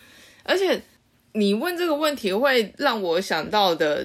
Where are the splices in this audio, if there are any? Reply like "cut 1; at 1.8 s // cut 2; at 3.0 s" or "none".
none